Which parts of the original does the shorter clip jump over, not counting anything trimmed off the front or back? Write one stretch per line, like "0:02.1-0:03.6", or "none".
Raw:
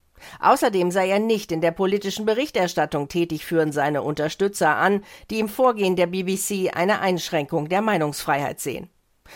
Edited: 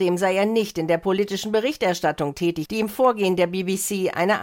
0:03.4-0:05.2